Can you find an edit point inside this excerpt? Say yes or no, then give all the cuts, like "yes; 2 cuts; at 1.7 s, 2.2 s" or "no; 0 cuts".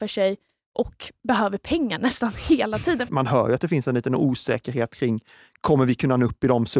yes; 1 cut; at 3.1 s